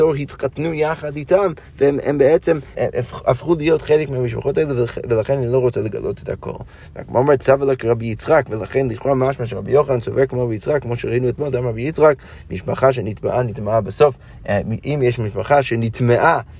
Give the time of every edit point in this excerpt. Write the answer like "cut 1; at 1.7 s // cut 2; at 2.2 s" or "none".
cut 1; at 2.7 s